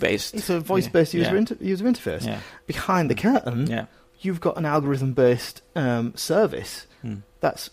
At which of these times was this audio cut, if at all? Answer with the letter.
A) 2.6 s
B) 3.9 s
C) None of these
A